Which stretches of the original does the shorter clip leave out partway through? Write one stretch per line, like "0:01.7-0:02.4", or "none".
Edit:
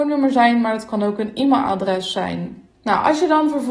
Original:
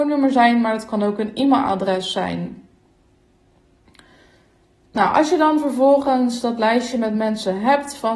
0:02.7-0:04.8

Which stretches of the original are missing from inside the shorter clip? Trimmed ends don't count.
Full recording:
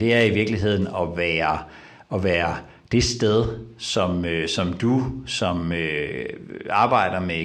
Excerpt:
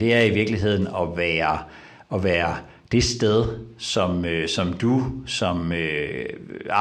none

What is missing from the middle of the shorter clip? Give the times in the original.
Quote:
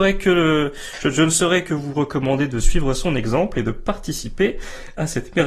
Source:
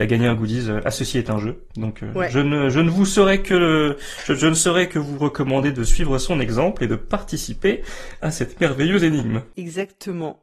none

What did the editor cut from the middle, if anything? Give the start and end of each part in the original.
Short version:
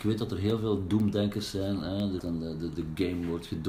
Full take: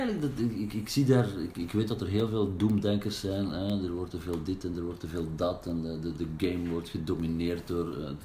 0:03.9-0:05.6

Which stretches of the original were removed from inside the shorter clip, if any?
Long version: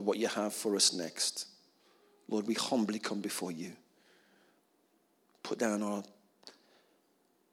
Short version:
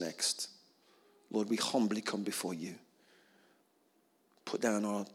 none

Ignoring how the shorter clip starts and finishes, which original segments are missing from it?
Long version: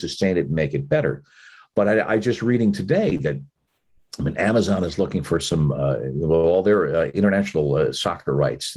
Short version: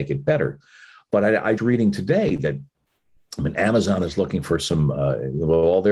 0:02.2-0:02.4

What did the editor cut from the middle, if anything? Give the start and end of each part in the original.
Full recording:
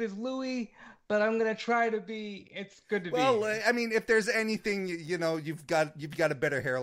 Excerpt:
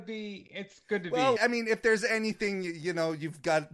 0:03.4-0:03.6

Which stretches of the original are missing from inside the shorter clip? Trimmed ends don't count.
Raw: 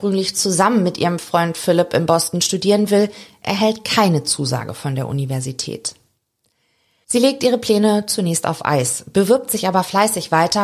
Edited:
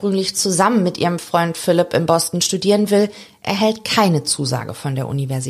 none

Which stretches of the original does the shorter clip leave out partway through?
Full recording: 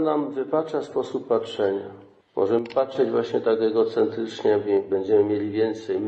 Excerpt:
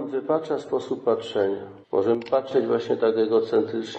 0:02.1-0:02.3

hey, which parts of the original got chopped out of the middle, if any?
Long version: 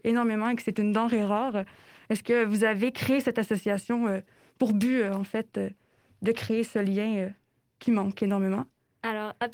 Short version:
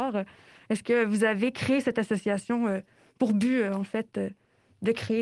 none

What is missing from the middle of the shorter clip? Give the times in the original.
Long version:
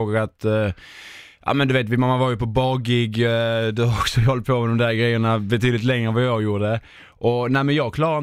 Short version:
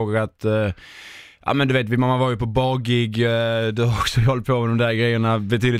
none

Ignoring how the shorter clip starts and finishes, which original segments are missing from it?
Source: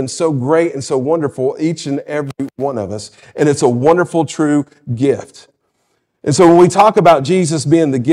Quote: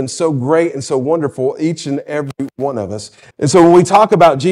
0:03.3-0:06.2

